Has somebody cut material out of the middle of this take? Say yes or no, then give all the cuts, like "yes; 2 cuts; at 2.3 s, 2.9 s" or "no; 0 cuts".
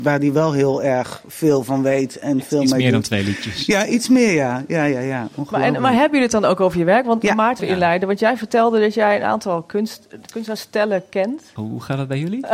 yes; 2 cuts; at 7.6 s, 11.6 s